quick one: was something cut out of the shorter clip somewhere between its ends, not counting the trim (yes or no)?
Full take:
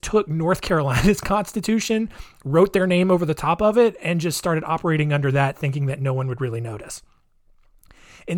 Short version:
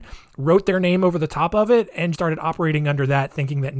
yes